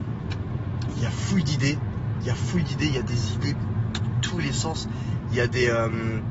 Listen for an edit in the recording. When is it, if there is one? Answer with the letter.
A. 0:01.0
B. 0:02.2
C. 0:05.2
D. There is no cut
A